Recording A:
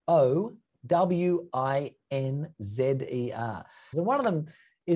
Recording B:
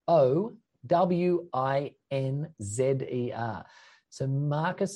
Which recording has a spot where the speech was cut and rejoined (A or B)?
A